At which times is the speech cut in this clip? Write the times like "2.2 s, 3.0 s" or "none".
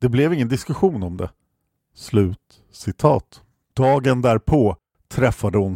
1.8 s, 3.7 s